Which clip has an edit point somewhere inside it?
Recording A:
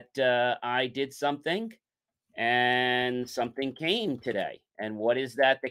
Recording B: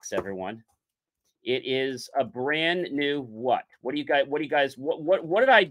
A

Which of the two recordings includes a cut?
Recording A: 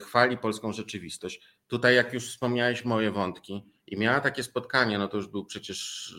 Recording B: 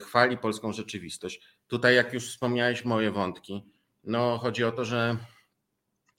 A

